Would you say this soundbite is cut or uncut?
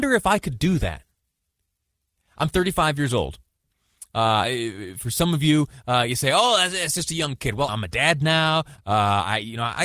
cut